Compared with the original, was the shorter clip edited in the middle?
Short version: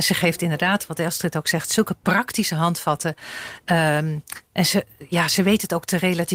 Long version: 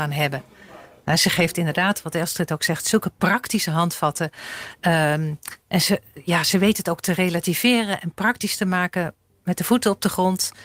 no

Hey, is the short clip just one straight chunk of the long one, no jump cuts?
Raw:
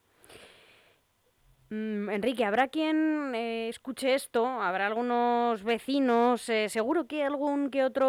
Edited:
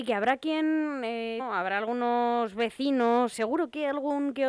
no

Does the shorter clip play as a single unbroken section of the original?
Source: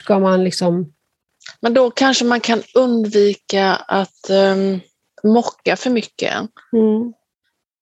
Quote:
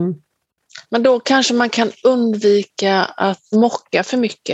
no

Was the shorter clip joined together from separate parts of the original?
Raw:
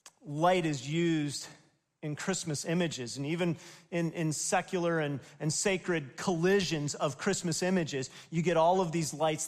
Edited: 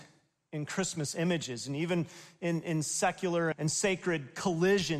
yes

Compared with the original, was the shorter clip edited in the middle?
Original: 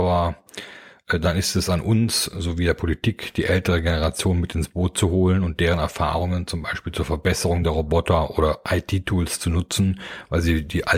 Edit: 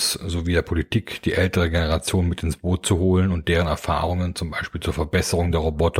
no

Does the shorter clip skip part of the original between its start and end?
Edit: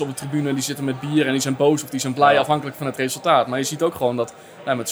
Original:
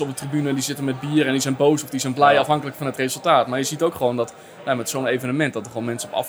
no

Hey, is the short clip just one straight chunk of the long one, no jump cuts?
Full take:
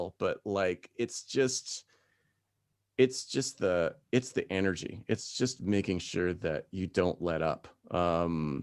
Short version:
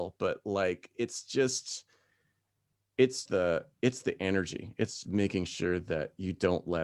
no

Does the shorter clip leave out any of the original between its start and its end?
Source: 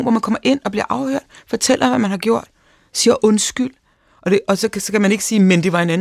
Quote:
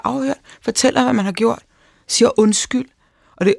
no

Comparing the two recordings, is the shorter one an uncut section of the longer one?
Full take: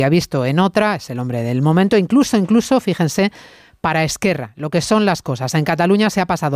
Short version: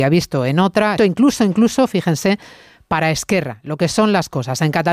no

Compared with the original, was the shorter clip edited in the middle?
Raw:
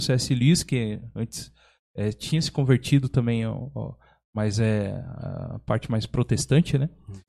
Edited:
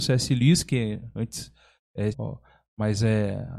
yes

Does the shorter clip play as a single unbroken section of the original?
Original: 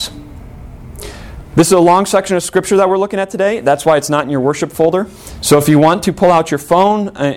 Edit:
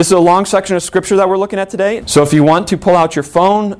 no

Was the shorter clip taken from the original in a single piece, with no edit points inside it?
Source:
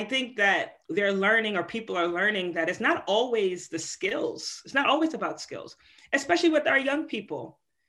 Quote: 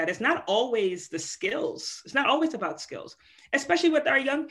yes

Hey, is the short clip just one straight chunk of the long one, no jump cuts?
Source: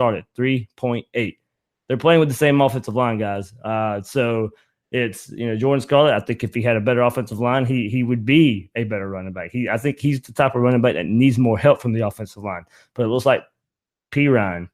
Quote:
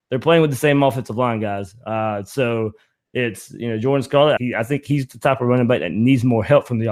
no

